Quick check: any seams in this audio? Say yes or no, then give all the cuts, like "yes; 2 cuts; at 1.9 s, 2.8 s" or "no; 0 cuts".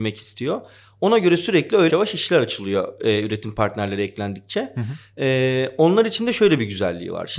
yes; 1 cut; at 1.9 s